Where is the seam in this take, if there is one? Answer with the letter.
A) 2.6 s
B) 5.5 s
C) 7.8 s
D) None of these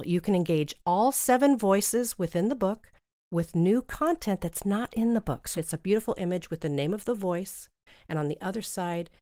B